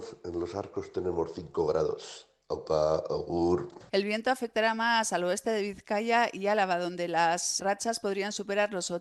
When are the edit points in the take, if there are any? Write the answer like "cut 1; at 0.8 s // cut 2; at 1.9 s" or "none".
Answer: cut 1; at 3.9 s // cut 2; at 7.6 s